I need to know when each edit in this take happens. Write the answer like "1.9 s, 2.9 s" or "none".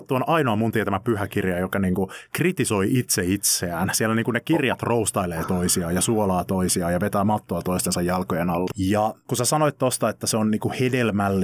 8.7 s